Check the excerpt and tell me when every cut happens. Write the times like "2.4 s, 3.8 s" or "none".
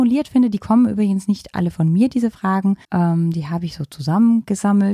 2.8 s

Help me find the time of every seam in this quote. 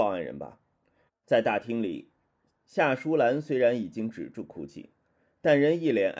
1.1 s

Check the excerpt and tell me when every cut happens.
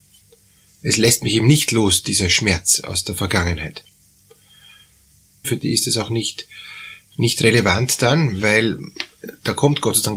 5.4 s

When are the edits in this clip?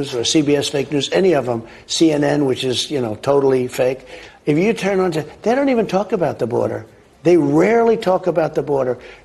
none

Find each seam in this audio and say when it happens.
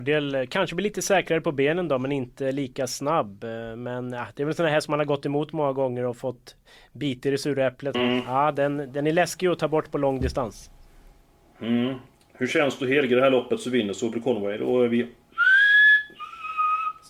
7.9 s

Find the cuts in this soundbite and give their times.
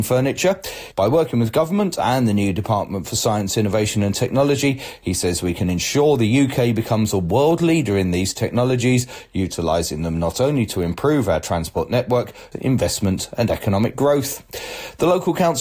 0.9 s, 12.5 s

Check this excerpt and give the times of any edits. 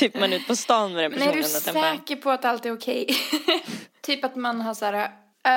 4.0 s

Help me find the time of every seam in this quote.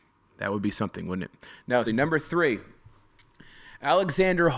1.9 s

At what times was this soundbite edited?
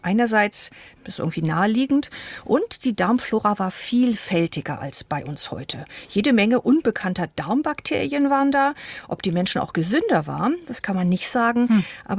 1.0 s

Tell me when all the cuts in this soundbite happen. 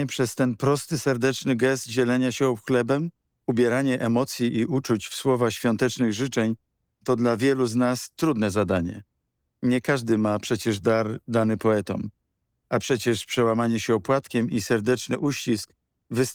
3.3 s

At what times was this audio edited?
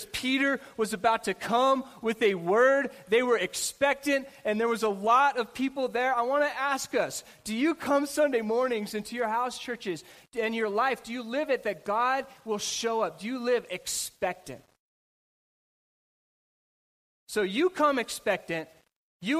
none

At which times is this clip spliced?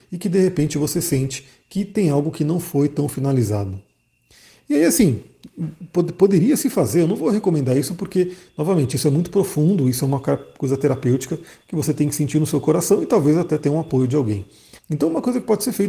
14.8 s

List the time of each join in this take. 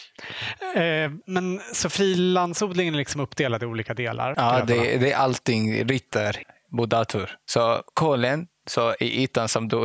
4.3 s

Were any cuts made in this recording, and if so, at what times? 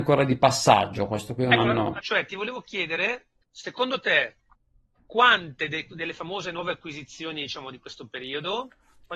2.0 s, 3.4 s

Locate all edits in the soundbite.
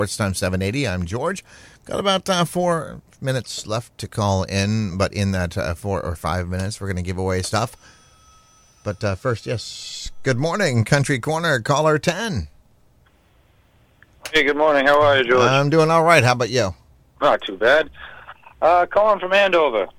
none

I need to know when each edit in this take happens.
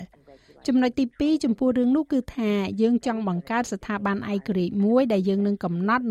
none

